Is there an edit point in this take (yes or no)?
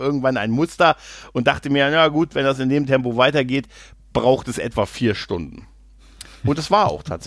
no